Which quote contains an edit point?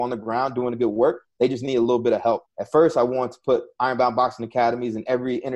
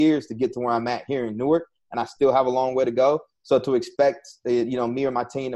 first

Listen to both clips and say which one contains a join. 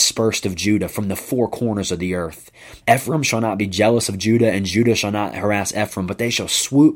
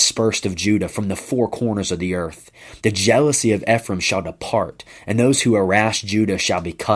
first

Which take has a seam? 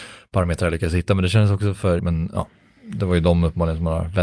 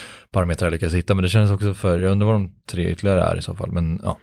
first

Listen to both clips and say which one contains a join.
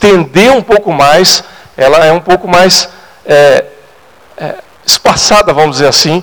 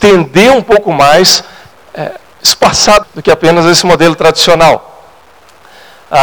second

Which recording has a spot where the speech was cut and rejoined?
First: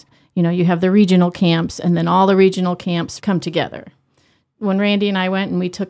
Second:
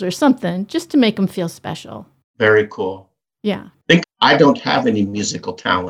second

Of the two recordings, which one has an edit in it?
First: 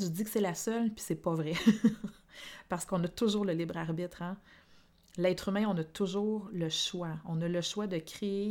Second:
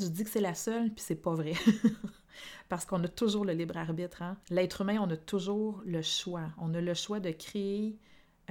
second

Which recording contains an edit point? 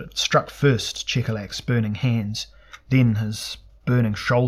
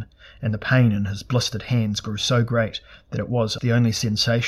second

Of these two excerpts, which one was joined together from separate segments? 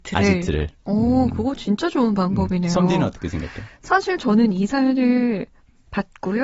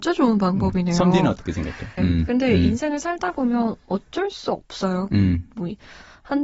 second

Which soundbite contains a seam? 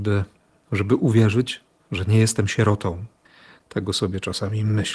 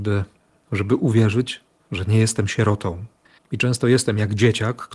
second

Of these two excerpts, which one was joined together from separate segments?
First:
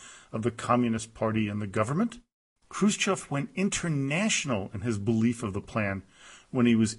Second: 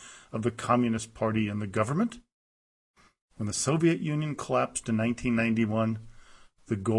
first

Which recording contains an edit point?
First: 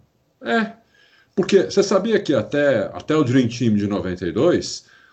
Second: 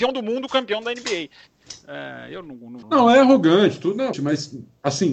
second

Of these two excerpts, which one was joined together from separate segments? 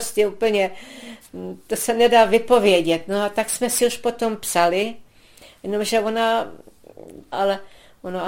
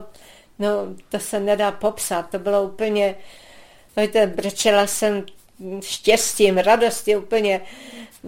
first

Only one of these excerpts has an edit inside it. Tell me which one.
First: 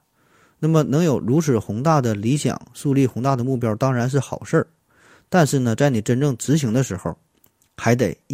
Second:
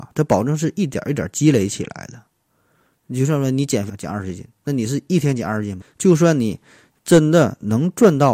second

